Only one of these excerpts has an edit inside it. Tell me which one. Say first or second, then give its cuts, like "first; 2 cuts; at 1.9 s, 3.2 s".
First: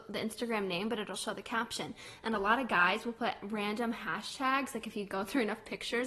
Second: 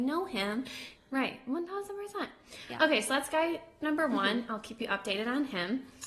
second; 1 cut; at 1.0 s